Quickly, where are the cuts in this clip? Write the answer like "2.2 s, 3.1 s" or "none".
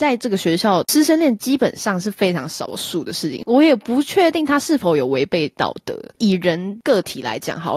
none

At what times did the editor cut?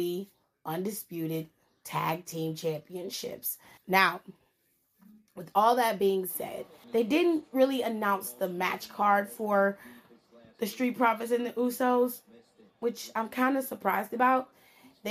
3.8 s, 6.8 s

